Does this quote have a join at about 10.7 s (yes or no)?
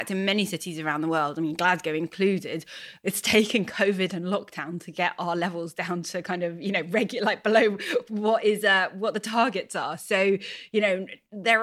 no